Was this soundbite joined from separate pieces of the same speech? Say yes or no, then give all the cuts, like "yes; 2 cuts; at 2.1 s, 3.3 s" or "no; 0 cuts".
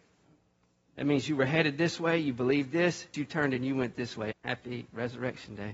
yes; 2 cuts; at 3.1 s, 4.3 s